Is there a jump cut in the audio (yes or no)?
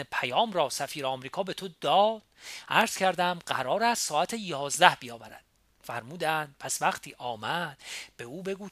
no